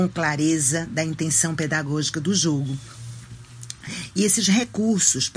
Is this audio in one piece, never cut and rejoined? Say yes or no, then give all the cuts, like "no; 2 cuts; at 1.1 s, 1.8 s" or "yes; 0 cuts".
yes; 0 cuts